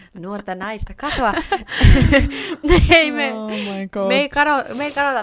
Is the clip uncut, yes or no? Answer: yes